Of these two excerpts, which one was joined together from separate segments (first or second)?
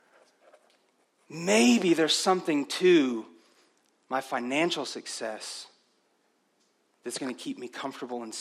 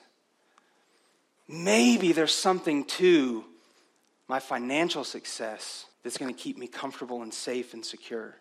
second